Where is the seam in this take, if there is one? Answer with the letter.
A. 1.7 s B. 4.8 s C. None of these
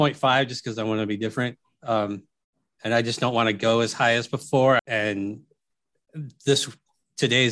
B